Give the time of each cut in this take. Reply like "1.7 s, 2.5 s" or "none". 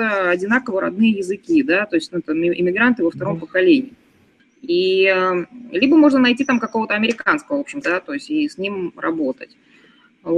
4.4 s, 7.8 s